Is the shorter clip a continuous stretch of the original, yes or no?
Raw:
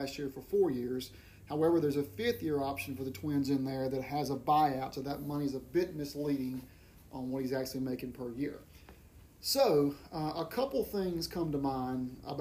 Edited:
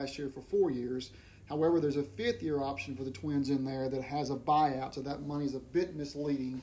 yes